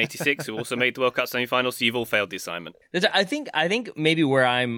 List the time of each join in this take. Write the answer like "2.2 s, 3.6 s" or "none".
2.8 s